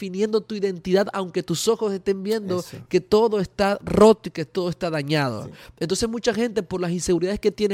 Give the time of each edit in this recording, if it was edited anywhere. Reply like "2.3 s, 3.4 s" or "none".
none